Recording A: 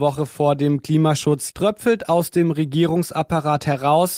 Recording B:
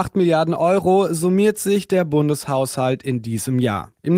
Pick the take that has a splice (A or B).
A